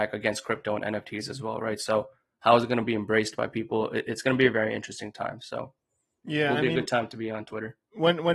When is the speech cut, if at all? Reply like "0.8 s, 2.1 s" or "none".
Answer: none

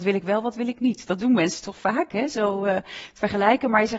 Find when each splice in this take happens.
none

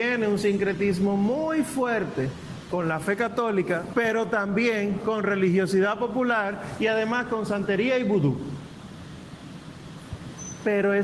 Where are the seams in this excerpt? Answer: 3.9 s

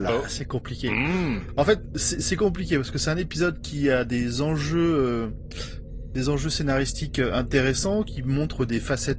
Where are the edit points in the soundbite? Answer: none

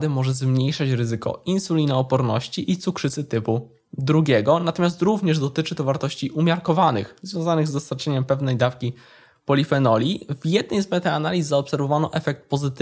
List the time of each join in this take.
none

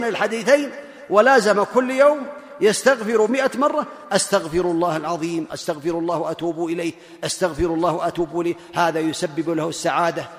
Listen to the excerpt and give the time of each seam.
5.5 s

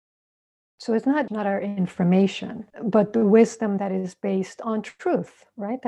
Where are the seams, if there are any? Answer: 1.3 s, 2.7 s

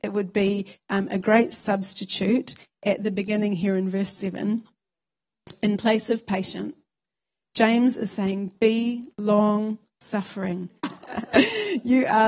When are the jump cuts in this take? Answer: 10.8 s

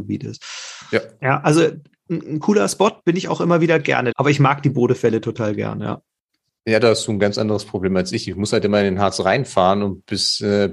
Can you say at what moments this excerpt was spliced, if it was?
4.1 s

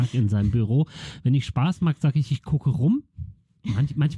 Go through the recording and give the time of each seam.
none

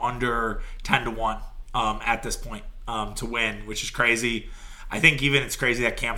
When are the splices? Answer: none

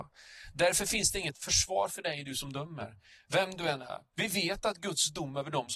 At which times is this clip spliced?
4.1 s

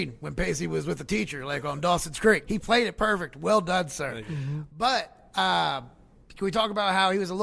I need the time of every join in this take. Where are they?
2.5 s

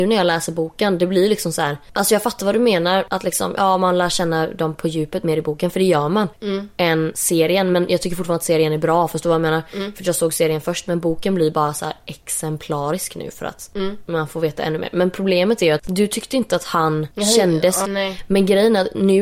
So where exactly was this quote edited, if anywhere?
6.3 s, 15.8 s, 17.8 s

